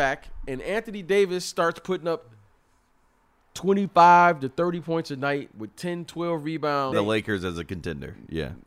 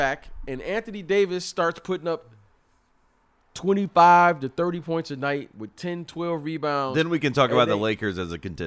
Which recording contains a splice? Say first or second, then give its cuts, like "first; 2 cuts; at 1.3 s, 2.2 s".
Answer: first; 1 cut; at 6.9 s